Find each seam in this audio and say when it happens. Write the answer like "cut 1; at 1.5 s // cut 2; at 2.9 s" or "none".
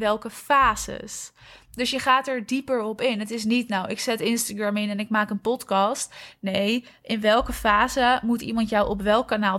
none